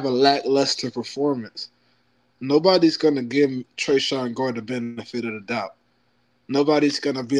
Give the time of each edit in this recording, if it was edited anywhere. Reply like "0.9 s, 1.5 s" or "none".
none